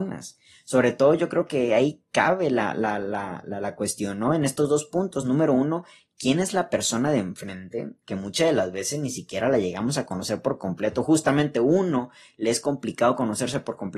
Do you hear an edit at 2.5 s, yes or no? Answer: no